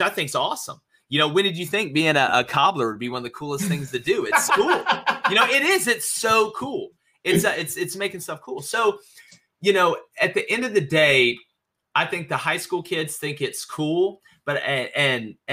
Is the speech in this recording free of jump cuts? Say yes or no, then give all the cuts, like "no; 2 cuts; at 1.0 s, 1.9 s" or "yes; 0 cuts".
no; 1 cut; at 4.5 s